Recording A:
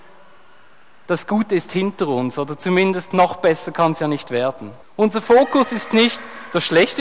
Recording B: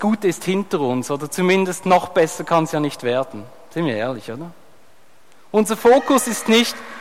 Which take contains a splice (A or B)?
A